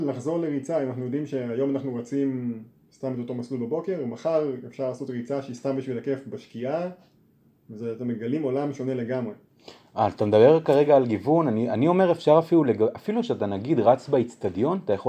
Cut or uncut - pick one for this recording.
uncut